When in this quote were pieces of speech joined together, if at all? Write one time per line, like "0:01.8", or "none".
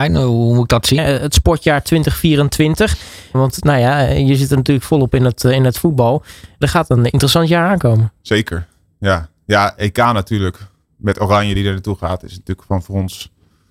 0:01.0
0:03.3
0:06.6

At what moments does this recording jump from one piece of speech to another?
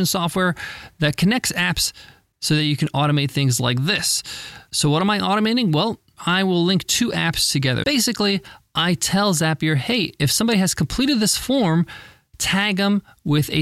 0:06.2
0:07.8

